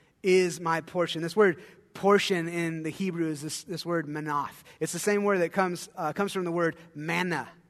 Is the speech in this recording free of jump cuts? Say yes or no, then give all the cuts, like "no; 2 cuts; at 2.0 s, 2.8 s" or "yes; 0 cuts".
yes; 0 cuts